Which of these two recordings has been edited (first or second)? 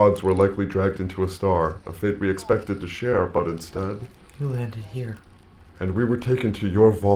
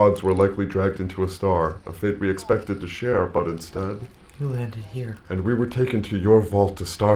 second